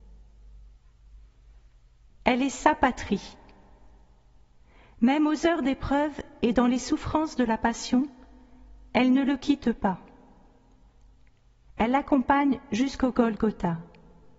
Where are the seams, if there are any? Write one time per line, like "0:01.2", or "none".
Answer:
0:02.1
0:11.6